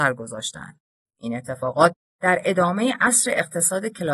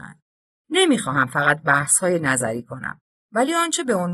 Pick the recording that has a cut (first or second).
first